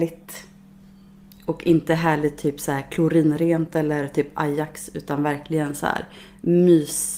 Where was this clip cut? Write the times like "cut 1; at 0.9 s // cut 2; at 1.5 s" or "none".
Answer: none